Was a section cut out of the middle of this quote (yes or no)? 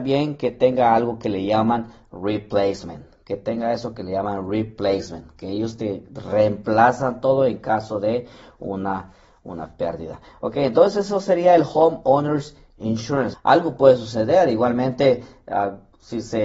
yes